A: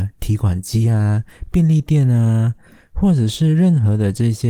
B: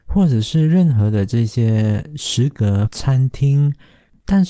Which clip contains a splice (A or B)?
B